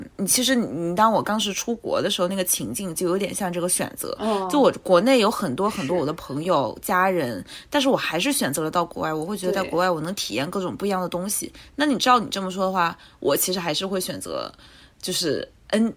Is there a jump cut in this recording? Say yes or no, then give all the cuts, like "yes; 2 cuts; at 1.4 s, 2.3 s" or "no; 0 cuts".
no; 0 cuts